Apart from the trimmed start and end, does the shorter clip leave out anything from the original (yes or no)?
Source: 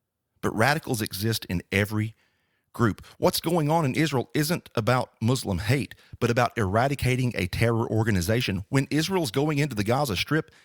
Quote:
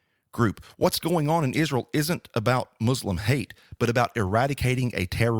no